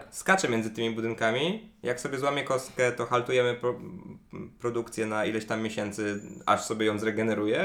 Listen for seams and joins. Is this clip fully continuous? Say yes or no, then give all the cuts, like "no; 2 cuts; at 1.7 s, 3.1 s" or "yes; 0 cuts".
yes; 0 cuts